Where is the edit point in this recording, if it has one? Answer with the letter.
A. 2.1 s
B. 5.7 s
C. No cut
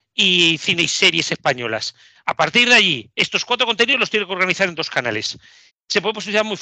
B